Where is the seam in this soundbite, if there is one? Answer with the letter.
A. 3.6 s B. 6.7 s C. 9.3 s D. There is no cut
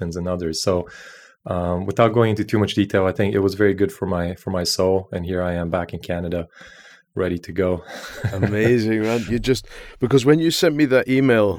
C